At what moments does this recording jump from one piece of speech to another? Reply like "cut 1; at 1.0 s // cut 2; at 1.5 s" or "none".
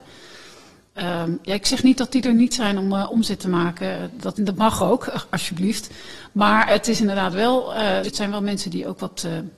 cut 1; at 4.3 s // cut 2; at 8.0 s